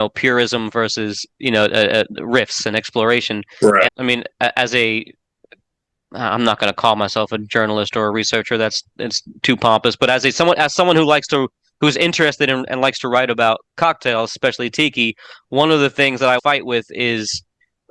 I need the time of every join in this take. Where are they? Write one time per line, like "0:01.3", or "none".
0:03.9
0:16.4